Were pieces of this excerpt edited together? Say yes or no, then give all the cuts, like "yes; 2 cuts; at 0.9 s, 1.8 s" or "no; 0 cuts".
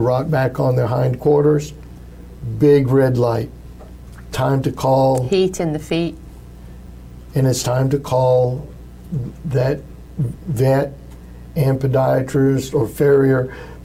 no; 0 cuts